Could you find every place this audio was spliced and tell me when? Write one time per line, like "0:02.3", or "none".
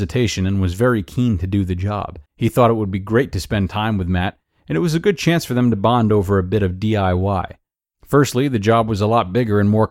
0:02.3
0:07.9